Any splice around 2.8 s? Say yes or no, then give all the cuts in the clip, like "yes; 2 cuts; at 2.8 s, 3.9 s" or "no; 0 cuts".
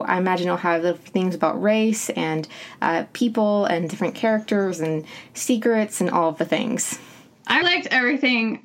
no; 1 cut; at 7.6 s